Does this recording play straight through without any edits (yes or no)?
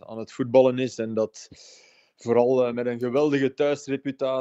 yes